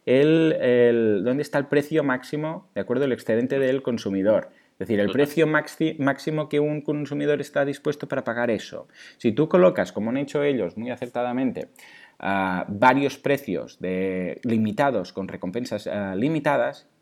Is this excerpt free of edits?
yes; 0 cuts

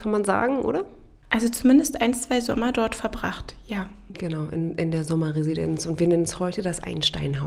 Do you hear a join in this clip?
no; 0 cuts

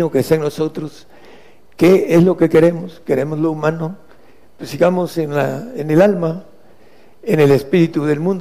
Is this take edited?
no; 0 cuts

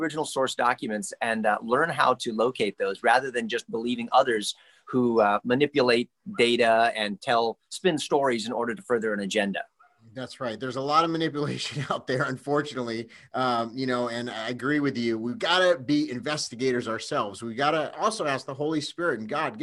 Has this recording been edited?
no; 0 cuts

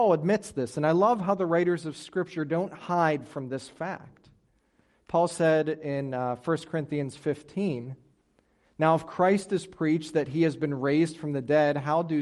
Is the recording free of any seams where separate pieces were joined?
yes; 0 cuts

